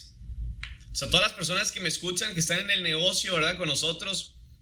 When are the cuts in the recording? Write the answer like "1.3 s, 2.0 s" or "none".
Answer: none